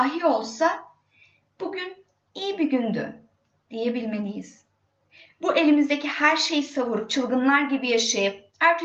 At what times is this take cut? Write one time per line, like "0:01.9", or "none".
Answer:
none

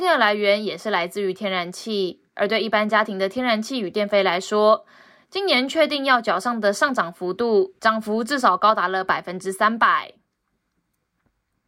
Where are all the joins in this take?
none

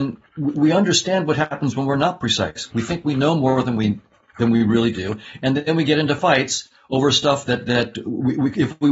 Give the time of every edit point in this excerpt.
0:02.7

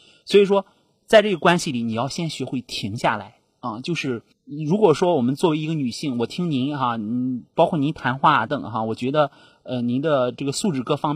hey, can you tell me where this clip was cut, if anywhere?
0:08.5

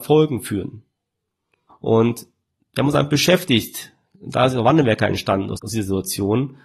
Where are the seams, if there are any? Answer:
0:01.7
0:05.6

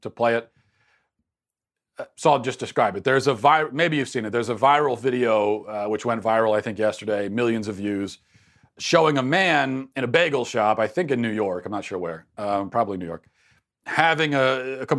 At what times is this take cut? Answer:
none

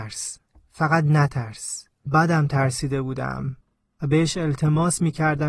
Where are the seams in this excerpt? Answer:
0:02.1

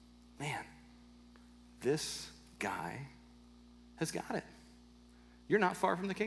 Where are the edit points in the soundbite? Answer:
none

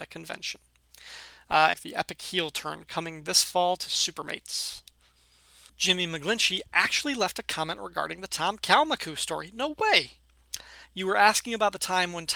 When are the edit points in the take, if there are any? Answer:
0:01.7

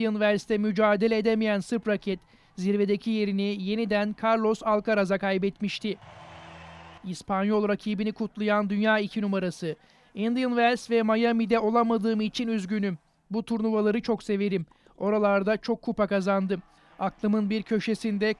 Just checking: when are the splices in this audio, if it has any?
none

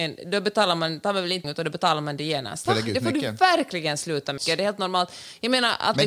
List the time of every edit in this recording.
0:01.4
0:02.7
0:04.4

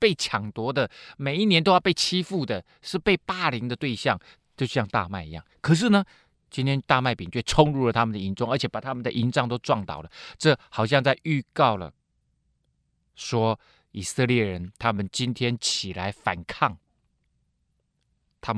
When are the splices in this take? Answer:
none

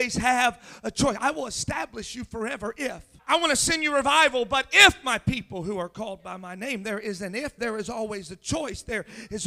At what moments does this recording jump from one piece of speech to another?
0:03.2
0:07.6

